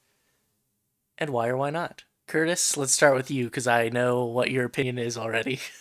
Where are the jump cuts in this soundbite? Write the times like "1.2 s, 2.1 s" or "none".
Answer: none